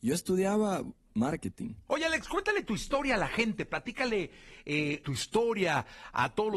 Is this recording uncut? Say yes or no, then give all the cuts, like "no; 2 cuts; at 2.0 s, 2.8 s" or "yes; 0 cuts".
no; 2 cuts; at 1.9 s, 5.0 s